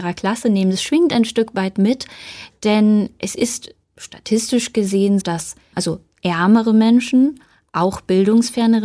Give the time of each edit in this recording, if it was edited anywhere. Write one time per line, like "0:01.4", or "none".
0:03.8
0:05.2